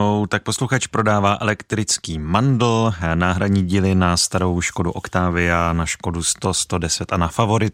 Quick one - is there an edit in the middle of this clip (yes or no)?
no